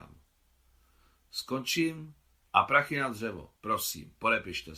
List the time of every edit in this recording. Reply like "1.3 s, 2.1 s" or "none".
3.6 s